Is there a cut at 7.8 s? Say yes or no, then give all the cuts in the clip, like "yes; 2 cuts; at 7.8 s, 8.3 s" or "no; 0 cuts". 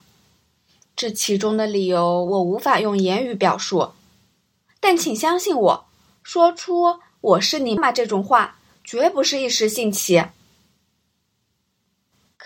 yes; 1 cut; at 7.8 s